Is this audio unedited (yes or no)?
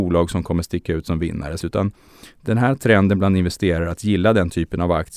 no